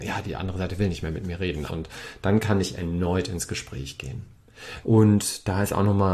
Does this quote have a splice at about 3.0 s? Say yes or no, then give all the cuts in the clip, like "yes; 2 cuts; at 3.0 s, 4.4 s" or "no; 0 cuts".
no; 2 cuts; at 1.7 s, 4.8 s